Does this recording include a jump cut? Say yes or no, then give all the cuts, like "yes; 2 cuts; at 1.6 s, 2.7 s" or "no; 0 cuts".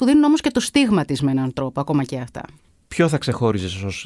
no; 0 cuts